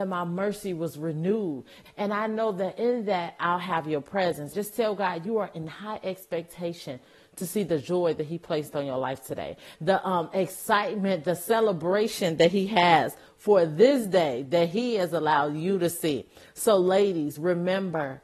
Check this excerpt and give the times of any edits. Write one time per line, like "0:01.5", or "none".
0:01.9
0:04.5
0:09.7